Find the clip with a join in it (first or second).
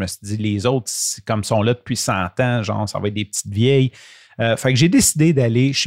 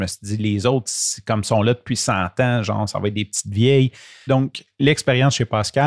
second